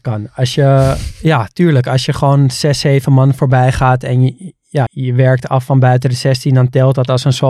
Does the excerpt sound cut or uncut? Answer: cut